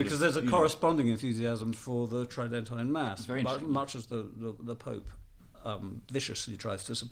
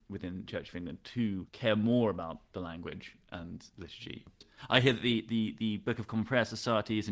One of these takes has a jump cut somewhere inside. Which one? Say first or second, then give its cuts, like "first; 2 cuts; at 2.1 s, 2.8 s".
second; 1 cut; at 1.5 s